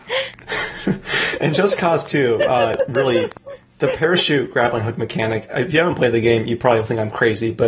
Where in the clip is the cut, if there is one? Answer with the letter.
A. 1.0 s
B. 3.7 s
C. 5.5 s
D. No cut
D